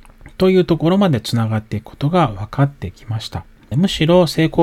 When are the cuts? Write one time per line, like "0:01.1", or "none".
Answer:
0:03.7

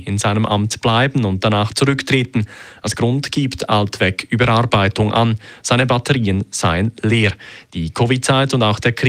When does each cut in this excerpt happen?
none

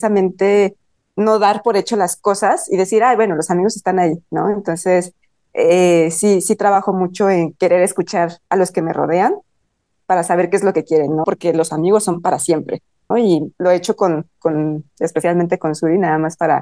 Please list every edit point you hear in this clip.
0:11.2
0:13.1
0:15.0

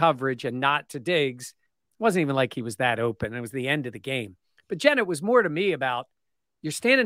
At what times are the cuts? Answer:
none

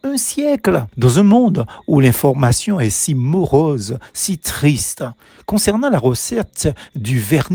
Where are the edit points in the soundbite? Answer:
0:00.9

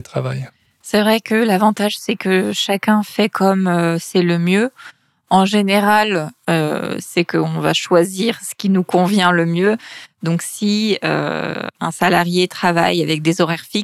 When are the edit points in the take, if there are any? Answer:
0:07.0

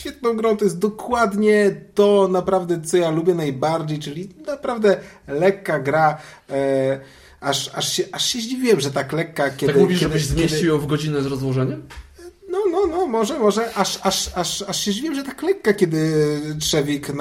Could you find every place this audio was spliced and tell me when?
none

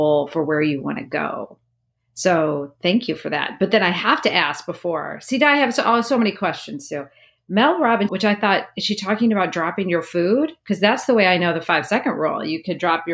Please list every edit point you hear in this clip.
0:08.1

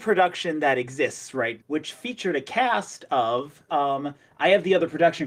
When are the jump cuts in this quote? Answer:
0:01.6
0:03.7

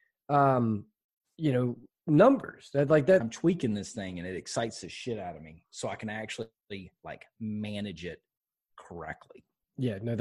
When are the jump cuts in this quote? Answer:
0:03.2

